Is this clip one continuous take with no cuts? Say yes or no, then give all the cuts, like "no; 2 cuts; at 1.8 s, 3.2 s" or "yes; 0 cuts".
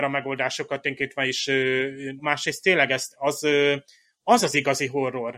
no; 1 cut; at 2.2 s